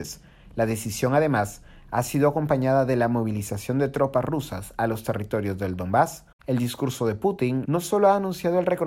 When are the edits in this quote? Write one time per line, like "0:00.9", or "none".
0:06.4
0:07.6